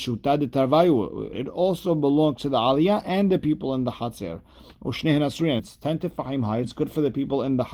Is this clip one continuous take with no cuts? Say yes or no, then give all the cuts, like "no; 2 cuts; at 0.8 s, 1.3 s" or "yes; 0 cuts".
no; 3 cuts; at 1.3 s, 5.6 s, 6.6 s